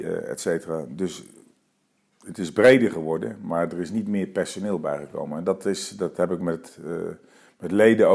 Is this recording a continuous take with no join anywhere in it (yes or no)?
yes